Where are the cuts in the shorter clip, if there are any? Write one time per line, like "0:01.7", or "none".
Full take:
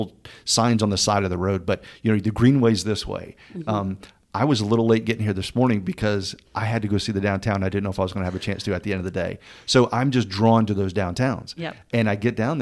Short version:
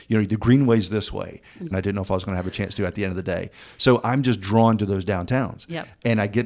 0:01.7